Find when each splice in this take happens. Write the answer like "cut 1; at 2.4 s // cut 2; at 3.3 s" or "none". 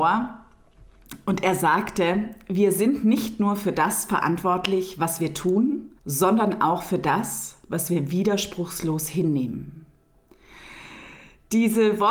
cut 1; at 6.0 s